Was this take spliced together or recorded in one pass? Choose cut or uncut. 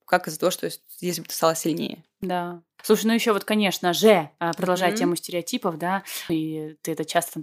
cut